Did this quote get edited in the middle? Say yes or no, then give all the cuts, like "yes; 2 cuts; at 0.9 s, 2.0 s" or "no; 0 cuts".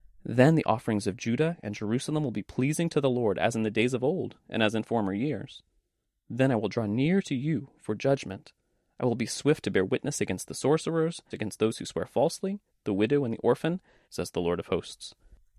yes; 3 cuts; at 11.3 s, 12.7 s, 14.0 s